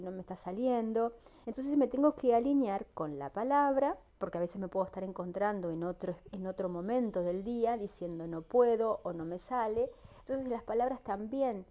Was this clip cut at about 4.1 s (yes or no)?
yes